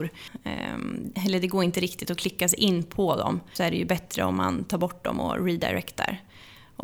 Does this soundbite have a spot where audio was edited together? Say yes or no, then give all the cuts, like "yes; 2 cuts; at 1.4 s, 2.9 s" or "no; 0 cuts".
no; 0 cuts